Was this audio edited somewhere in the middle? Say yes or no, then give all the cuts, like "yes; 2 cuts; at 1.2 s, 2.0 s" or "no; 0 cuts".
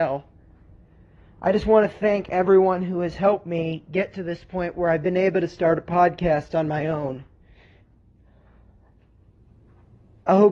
no; 0 cuts